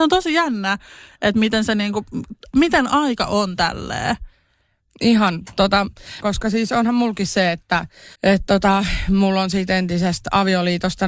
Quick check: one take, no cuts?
no; 2 cuts; at 6.2 s, 8.1 s

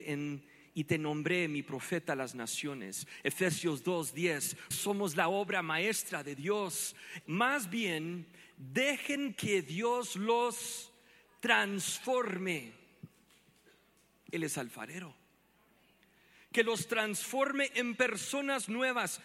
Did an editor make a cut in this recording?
yes; 2 cuts; at 4.7 s, 7.3 s

